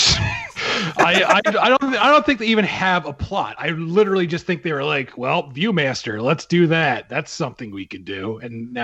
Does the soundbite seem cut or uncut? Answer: uncut